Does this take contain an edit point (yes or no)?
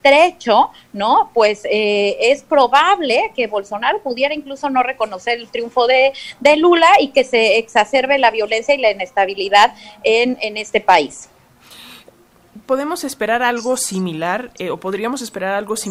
no